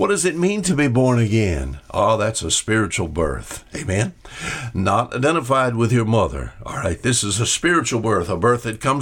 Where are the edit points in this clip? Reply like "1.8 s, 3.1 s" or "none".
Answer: none